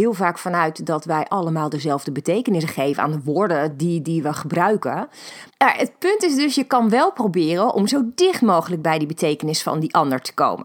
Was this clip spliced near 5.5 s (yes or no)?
yes